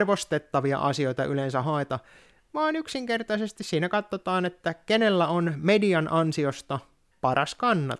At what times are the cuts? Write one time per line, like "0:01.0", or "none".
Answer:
none